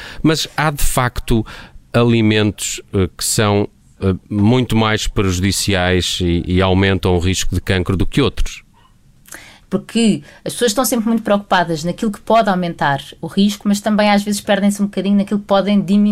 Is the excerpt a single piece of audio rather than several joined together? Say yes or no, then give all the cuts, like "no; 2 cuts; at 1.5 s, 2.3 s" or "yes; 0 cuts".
no; 1 cut; at 9.6 s